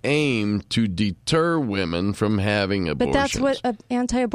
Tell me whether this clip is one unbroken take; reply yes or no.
yes